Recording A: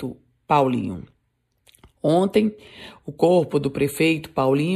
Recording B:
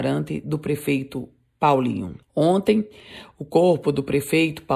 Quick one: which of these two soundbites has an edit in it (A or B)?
B